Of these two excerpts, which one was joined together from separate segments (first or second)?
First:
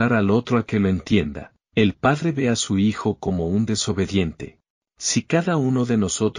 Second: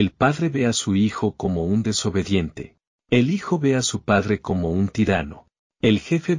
first